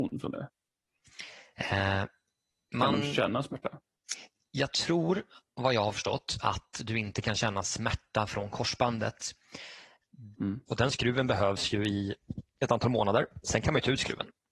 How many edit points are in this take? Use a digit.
1